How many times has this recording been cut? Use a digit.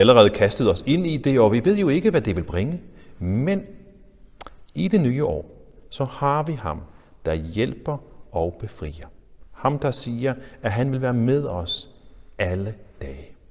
0